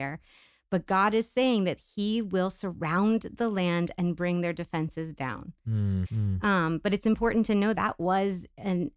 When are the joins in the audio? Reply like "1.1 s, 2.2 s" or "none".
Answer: 6.0 s, 7.7 s